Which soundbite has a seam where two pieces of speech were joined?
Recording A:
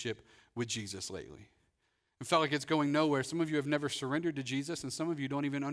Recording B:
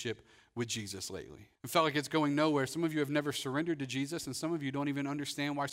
B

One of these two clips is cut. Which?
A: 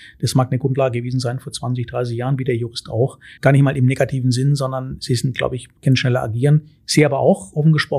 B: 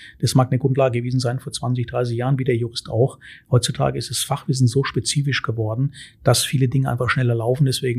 A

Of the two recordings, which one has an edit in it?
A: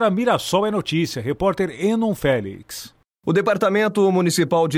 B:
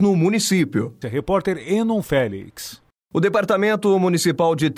B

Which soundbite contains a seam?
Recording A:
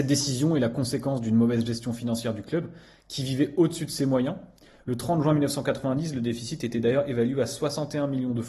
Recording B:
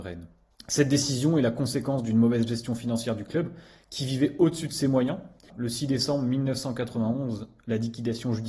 B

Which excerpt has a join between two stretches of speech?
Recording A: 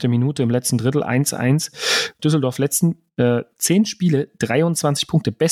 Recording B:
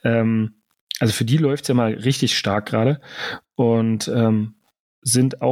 A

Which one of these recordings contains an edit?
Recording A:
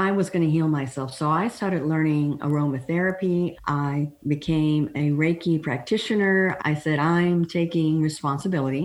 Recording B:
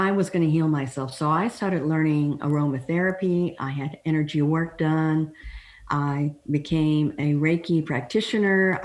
A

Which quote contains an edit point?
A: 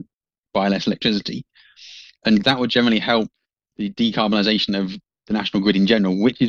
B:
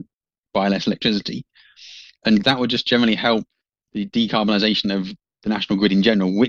A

